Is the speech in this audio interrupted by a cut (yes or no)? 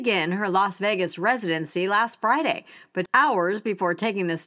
yes